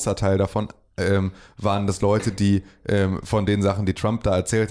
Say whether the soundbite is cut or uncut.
uncut